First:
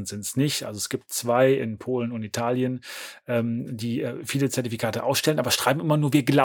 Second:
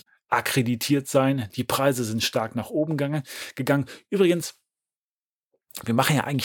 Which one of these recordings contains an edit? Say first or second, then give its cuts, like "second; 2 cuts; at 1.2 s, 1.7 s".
second; 1 cut; at 1.5 s